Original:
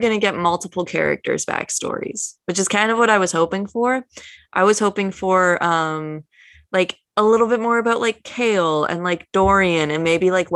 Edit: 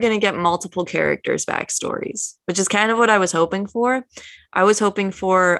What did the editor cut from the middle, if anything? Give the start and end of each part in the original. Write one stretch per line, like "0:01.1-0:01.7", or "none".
none